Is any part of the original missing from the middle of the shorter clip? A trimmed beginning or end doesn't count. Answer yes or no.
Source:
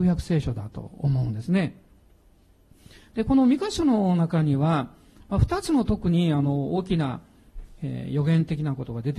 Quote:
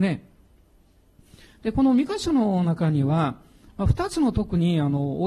no